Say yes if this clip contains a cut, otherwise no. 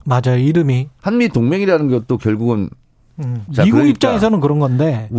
yes